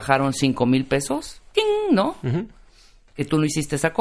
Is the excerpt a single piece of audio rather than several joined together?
yes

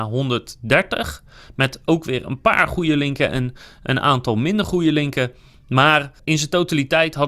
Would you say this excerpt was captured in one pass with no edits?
no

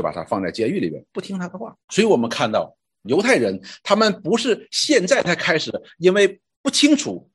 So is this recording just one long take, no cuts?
no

